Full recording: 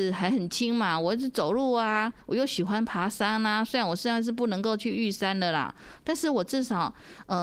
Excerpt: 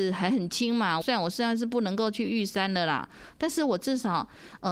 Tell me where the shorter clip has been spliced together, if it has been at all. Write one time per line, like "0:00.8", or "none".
0:01.0